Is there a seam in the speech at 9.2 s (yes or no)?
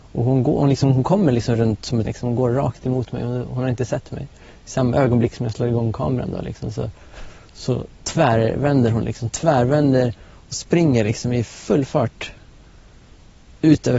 yes